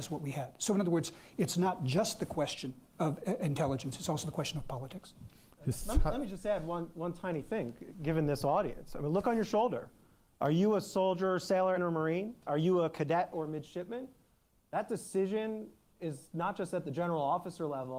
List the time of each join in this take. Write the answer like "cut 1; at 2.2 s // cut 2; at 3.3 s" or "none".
cut 1; at 11.8 s